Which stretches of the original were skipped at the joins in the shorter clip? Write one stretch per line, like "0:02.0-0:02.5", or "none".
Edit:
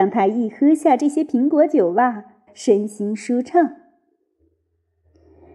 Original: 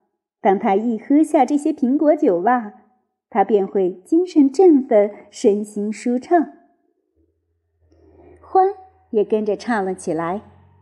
0:03.0-0:05.2